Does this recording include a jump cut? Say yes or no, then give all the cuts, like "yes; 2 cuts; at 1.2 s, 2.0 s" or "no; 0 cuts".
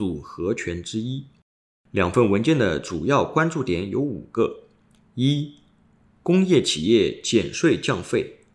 no; 0 cuts